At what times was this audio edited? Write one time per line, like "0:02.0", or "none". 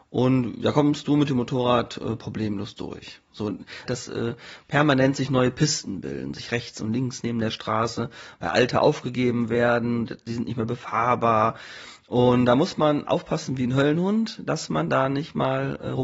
0:03.9